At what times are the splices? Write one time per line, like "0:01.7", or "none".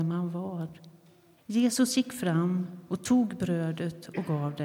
0:01.4